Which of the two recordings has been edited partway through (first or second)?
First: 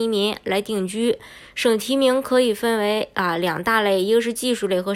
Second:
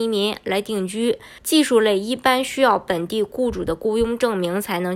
second